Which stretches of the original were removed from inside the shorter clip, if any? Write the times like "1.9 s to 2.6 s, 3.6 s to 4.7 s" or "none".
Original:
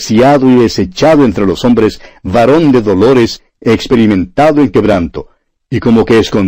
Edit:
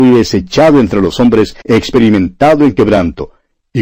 2.1 s to 3.6 s